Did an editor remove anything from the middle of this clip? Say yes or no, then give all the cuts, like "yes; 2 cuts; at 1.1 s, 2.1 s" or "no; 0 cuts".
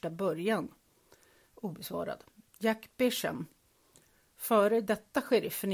no; 0 cuts